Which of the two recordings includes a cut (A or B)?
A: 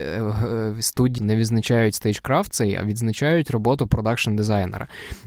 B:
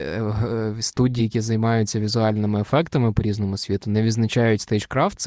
A